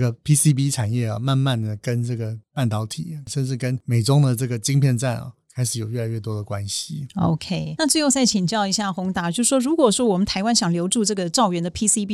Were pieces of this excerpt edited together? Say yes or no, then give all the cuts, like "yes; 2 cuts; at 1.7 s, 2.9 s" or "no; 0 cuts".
no; 0 cuts